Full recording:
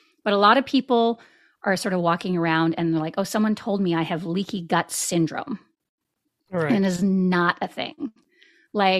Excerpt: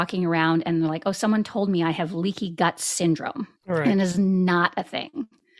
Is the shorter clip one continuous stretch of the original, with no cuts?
no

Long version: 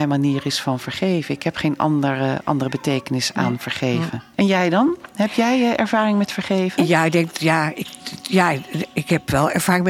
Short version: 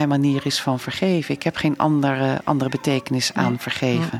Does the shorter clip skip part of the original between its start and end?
no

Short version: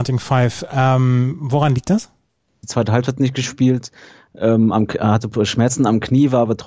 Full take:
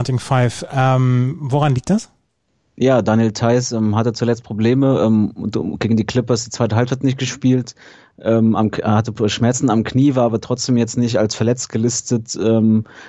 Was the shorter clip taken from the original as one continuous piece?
no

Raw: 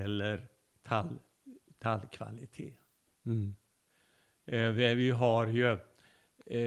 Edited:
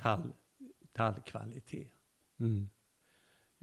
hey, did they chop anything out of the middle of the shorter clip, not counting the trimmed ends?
no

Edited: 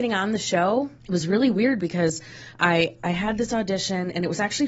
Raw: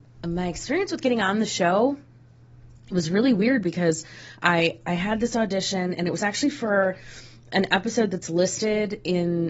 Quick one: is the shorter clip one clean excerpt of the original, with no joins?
no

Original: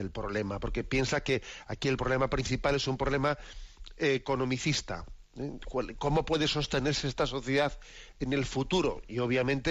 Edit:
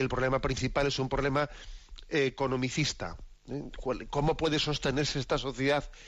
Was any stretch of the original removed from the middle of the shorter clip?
no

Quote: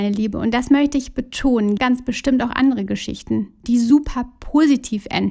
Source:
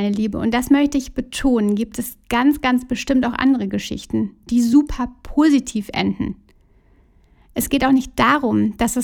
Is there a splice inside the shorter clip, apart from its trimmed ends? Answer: yes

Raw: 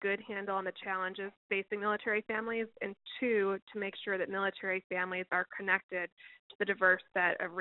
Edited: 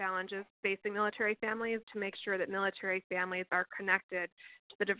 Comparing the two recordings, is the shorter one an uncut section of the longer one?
no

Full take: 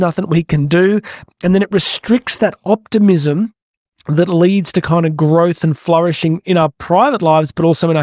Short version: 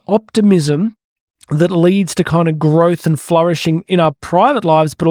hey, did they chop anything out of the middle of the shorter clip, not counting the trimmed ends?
no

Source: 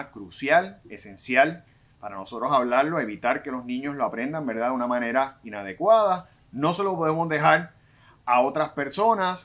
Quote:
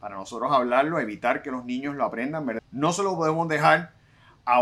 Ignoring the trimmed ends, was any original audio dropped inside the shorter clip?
yes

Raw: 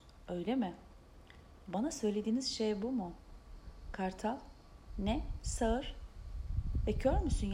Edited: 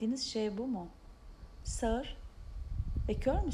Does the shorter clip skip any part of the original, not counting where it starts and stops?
yes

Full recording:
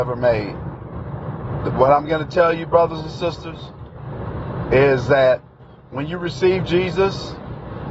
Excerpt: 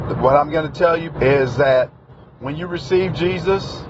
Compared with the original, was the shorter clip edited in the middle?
yes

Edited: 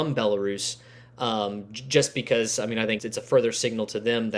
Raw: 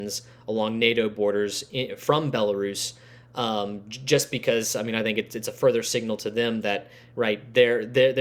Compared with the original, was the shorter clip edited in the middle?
yes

